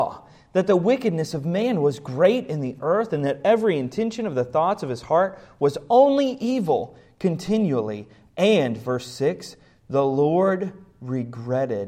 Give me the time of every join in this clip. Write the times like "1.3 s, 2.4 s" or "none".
none